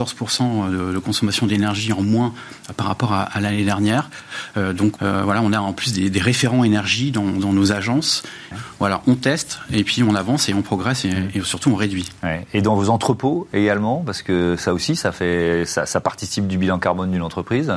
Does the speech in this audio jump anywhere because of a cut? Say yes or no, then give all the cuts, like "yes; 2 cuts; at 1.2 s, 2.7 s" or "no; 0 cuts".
yes; 2 cuts; at 5.0 s, 8.5 s